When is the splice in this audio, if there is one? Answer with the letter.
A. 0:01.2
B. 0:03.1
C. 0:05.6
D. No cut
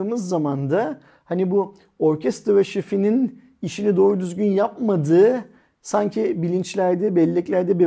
D